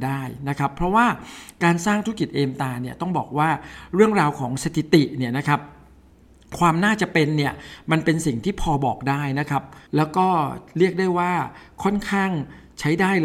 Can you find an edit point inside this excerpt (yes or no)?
yes